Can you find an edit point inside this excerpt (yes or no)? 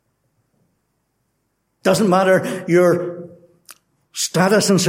no